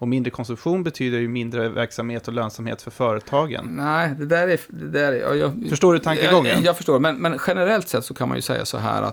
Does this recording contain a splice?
no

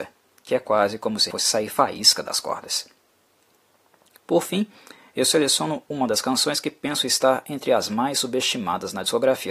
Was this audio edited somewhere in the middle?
yes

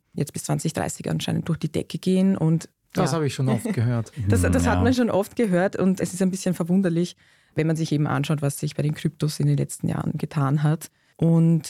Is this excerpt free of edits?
yes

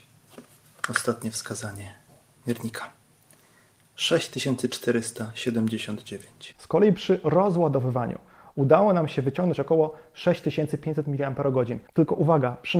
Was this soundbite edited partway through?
no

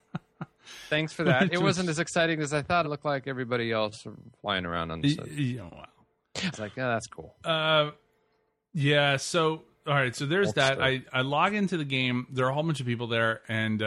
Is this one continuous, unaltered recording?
no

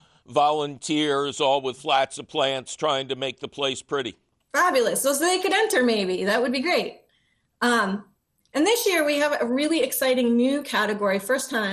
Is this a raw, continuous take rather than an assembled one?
yes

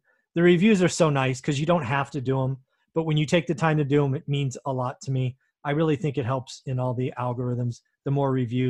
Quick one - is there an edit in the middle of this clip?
no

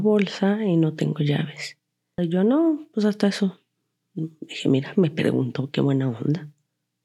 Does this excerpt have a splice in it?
yes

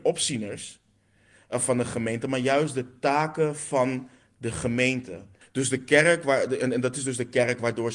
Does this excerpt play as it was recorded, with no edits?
no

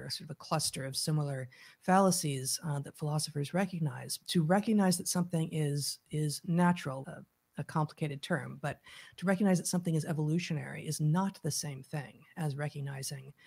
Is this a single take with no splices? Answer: no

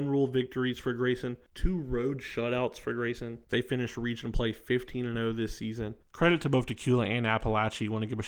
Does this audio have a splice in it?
yes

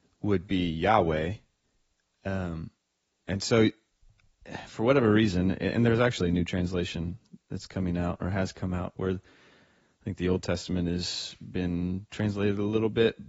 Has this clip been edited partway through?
no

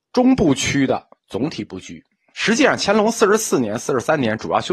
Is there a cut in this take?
yes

